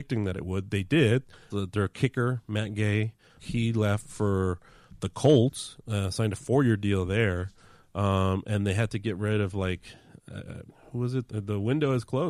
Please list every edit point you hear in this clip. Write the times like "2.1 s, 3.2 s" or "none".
1.5 s, 3.4 s, 11.3 s